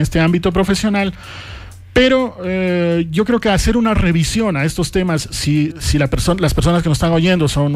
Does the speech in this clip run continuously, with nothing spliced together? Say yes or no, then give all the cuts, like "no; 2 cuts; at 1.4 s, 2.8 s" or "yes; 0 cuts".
no; 1 cut; at 5.7 s